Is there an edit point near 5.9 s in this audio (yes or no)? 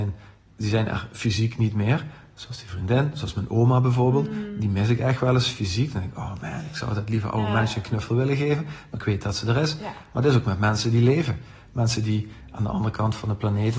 no